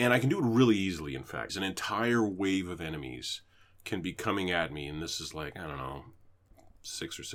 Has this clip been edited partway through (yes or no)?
yes